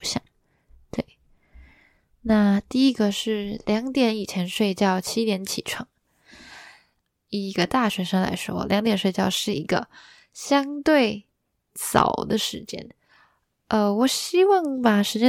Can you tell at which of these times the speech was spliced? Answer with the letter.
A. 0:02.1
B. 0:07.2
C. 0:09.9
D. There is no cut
B